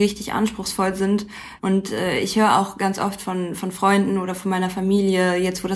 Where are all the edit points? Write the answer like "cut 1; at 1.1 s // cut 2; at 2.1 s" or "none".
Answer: cut 1; at 1.6 s